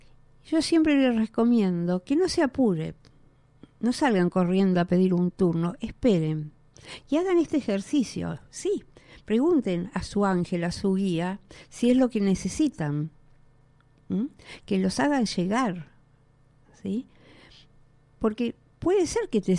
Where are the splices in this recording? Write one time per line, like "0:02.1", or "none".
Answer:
none